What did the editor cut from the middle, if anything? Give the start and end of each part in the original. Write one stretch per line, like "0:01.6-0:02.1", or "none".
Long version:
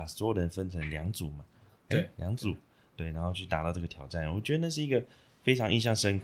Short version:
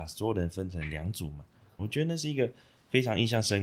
0:01.8-0:04.3